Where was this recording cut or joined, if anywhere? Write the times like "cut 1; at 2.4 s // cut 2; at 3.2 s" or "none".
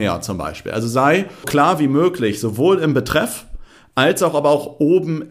cut 1; at 1.4 s